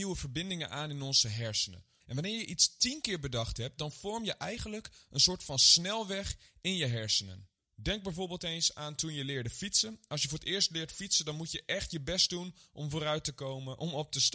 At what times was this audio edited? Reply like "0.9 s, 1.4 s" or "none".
2.0 s